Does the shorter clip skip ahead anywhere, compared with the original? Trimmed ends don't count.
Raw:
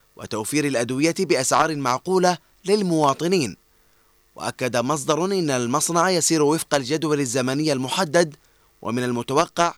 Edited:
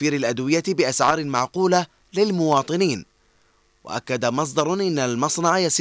no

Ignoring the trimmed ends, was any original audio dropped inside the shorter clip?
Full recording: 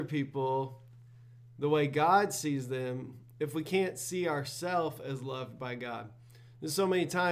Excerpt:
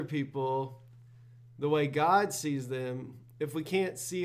no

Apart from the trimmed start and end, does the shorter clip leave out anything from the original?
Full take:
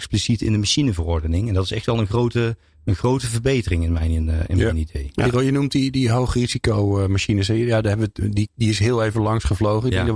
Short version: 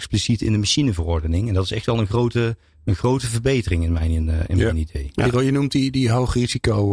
no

